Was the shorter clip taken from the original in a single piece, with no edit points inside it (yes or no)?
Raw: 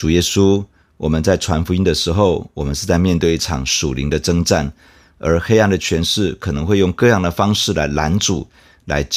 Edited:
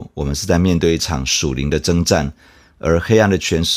yes